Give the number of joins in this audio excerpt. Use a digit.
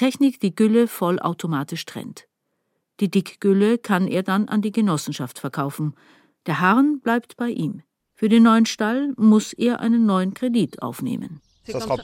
1